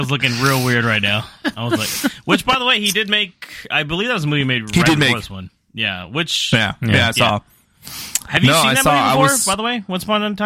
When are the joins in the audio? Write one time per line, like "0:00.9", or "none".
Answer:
none